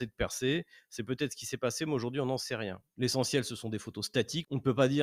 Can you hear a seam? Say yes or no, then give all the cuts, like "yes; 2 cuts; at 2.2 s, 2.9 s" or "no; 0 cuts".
yes; 1 cut; at 2.9 s